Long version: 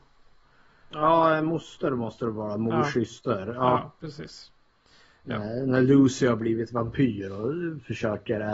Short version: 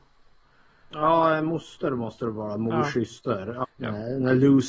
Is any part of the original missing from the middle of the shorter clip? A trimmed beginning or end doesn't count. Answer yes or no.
yes